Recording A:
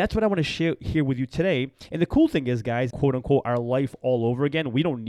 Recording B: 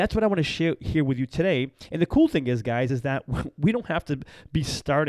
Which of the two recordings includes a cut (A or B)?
A